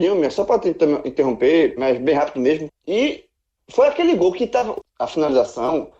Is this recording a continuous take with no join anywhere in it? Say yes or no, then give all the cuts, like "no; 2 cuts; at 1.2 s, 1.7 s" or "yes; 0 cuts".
no; 2 cuts; at 2.7 s, 4.8 s